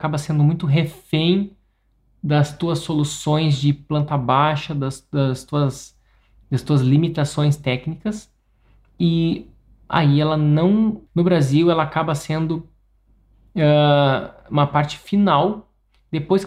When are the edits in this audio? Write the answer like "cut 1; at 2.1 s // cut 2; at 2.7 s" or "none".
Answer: cut 1; at 11.1 s